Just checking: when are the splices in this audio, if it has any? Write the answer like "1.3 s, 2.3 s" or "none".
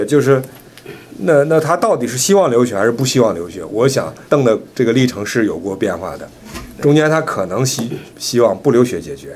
4.3 s, 8.1 s